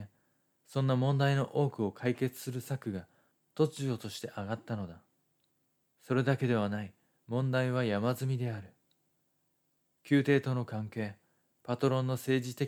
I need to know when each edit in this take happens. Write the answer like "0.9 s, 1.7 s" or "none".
5.9 s